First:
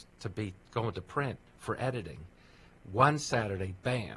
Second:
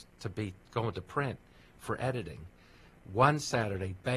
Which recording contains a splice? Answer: first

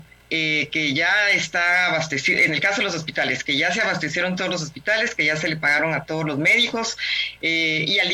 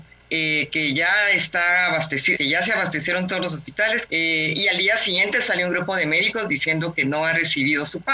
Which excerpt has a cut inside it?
second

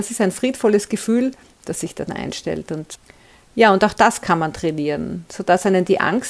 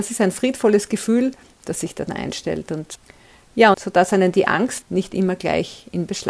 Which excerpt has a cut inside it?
second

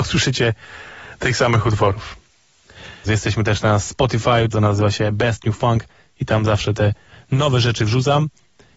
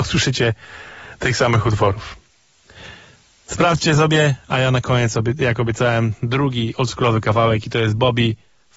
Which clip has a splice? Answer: first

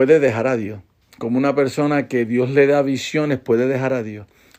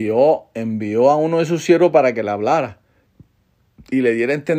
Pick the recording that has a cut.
first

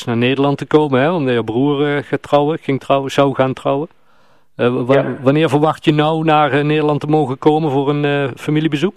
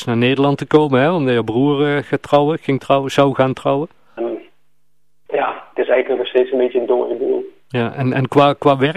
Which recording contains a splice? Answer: second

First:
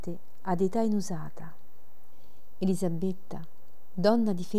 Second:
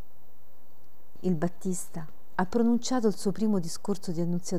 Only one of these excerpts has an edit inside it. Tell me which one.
second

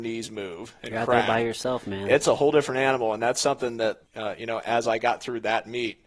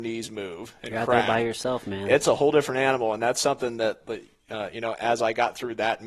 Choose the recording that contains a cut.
first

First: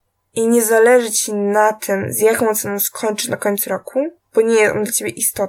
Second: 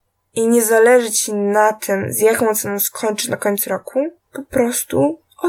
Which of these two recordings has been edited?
second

